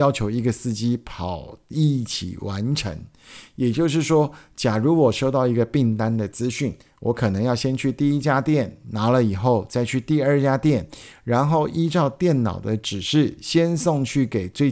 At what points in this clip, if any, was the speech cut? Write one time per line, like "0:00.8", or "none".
none

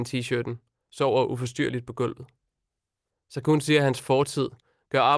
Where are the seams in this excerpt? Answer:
0:03.1

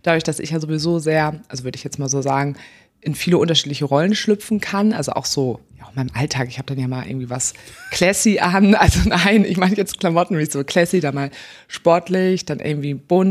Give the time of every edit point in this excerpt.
none

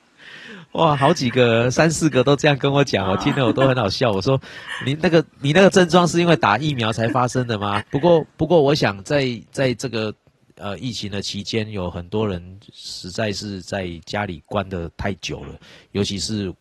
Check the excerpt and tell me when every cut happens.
0:07.8

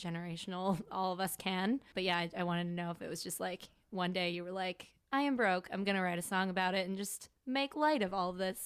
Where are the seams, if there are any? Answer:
none

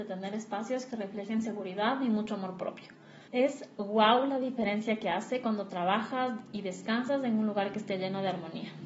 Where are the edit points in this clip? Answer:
0:03.3

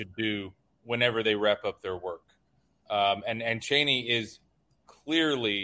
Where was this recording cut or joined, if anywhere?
none

